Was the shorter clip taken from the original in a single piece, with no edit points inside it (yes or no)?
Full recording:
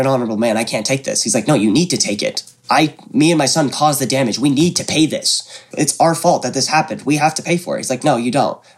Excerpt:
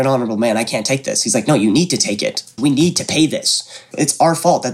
no